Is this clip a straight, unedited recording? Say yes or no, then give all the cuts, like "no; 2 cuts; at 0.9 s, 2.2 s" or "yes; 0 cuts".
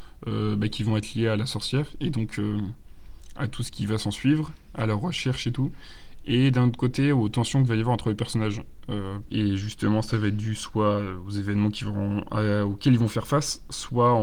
no; 1 cut; at 9.3 s